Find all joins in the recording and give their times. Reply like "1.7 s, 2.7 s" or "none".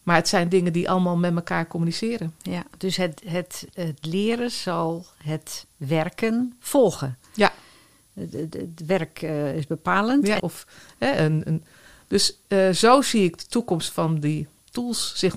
10.4 s